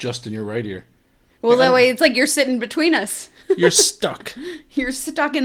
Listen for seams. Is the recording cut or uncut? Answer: uncut